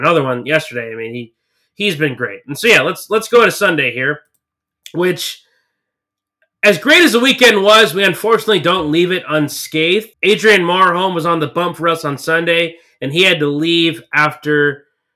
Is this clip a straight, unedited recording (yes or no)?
no